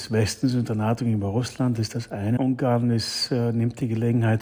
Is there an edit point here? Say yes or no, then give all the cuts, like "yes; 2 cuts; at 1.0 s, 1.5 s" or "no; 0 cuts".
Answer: yes; 1 cut; at 2.4 s